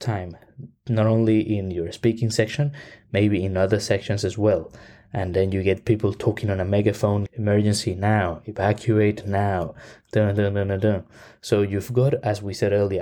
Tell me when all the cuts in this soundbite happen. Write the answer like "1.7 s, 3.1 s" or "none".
7.3 s